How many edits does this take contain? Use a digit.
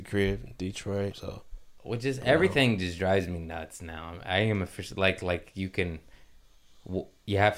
1